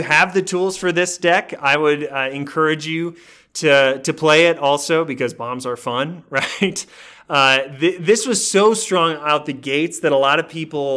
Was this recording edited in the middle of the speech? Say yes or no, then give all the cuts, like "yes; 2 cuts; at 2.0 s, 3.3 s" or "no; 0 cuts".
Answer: no; 0 cuts